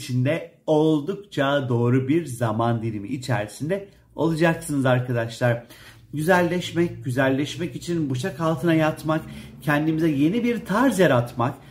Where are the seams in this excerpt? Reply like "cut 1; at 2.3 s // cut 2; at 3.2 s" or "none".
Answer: none